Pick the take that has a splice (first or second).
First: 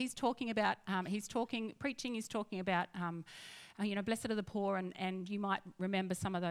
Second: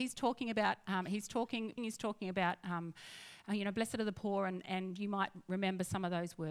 second